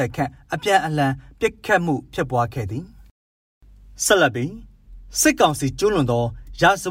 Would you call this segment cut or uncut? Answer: uncut